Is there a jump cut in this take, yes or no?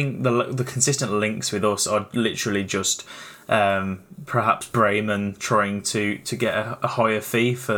no